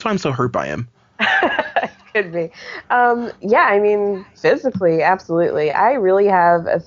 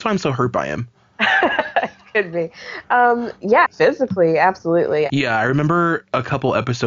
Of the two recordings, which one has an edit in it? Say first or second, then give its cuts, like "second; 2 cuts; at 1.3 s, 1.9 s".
second; 2 cuts; at 3.7 s, 5.1 s